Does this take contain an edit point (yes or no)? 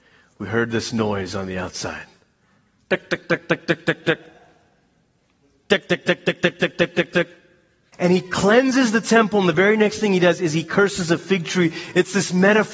yes